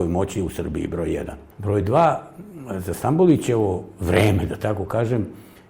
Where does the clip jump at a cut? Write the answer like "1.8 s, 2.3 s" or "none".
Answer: none